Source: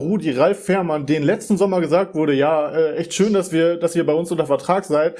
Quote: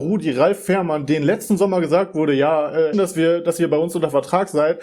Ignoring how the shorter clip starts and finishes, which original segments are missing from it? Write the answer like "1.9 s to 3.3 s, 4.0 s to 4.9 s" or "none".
2.9 s to 3.3 s